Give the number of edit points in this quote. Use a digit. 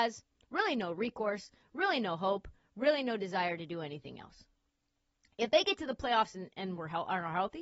0